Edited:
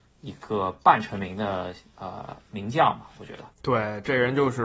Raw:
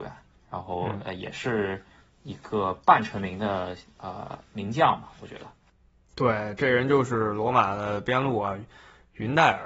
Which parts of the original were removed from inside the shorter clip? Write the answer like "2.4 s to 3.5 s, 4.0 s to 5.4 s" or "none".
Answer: 5.6 s to 6.1 s